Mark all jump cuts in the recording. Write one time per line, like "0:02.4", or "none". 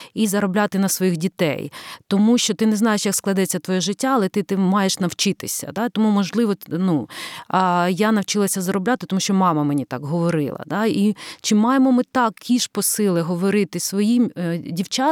none